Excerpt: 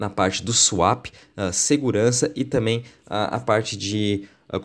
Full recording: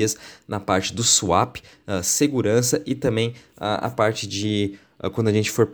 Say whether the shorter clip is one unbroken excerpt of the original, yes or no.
yes